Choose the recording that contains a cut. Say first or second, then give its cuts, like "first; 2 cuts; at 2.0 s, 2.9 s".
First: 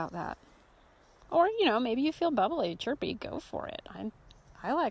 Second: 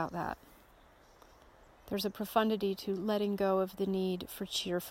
first; 1 cut; at 1.2 s